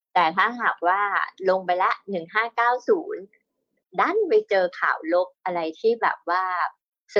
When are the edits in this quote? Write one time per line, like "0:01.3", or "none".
none